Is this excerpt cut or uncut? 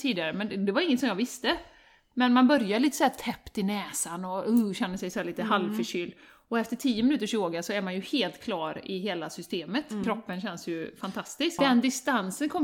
cut